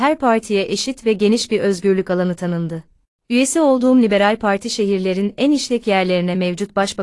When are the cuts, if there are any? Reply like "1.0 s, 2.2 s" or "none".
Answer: none

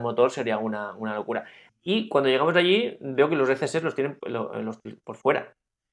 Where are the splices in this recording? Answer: 1.7 s

